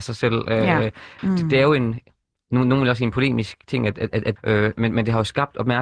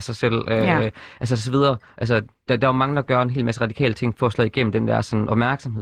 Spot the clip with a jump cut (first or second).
first